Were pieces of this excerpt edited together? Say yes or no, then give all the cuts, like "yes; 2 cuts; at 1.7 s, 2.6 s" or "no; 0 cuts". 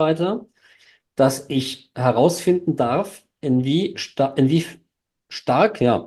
no; 0 cuts